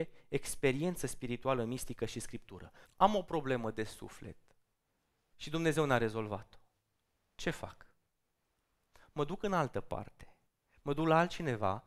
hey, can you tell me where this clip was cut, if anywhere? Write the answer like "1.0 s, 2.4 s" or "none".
2.8 s, 5.3 s